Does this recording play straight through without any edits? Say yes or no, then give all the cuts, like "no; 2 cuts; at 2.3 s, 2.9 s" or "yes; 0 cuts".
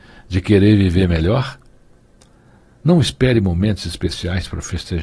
yes; 0 cuts